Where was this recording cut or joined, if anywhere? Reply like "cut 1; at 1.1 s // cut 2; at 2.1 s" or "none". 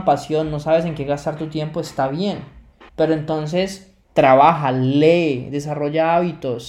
cut 1; at 2.9 s // cut 2; at 4.0 s